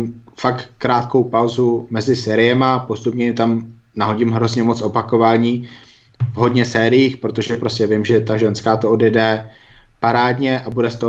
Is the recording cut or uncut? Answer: uncut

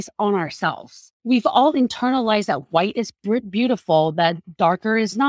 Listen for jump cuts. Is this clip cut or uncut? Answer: cut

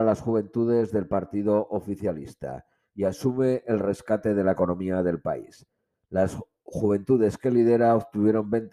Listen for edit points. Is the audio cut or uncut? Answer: uncut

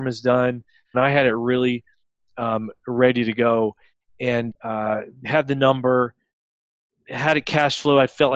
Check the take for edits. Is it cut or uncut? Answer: cut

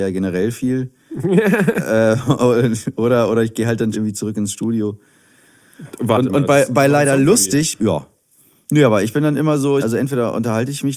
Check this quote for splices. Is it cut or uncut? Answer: cut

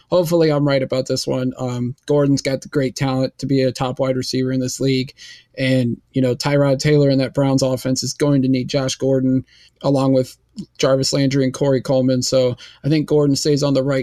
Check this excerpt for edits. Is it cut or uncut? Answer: cut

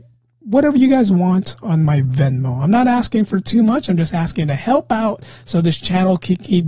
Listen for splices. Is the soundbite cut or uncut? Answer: uncut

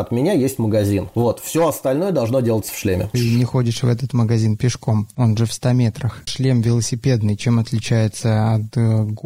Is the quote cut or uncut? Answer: cut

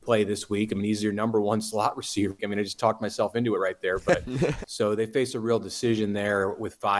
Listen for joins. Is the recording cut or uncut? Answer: cut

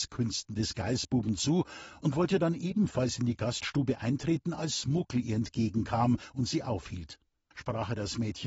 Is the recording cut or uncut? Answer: cut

